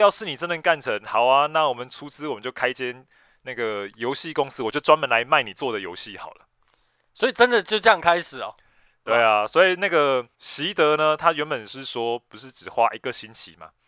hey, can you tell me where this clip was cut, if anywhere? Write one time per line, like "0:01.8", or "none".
0:09.1
0:10.3